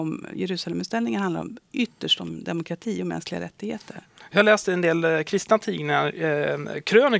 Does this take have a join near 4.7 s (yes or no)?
yes